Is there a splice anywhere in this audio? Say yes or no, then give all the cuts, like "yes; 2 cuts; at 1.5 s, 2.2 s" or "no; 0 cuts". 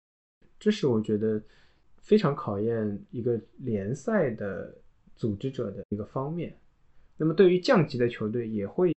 yes; 1 cut; at 7.1 s